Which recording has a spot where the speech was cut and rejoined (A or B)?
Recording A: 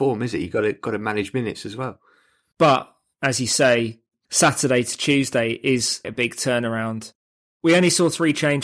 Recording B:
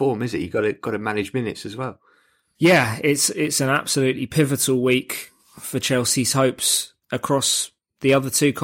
A